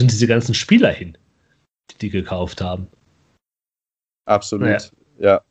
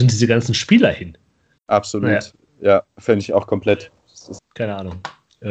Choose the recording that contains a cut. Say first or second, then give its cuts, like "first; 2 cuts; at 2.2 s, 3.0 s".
second; 2 cuts; at 1.6 s, 4.4 s